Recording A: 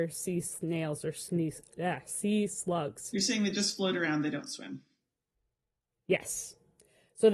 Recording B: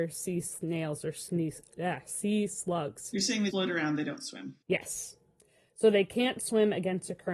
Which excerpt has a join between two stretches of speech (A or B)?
B